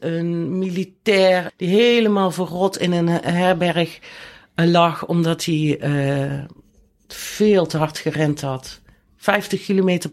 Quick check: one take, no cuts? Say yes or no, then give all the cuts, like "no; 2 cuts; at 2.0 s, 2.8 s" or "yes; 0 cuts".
no; 1 cut; at 1.5 s